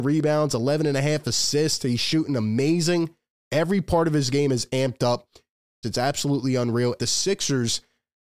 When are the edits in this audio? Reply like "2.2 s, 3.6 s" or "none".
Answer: 5.8 s, 7.0 s